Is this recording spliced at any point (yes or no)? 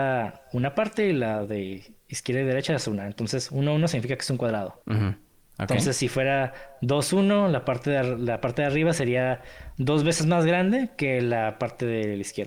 yes